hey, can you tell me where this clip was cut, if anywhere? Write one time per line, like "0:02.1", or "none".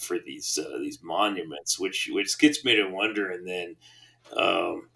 none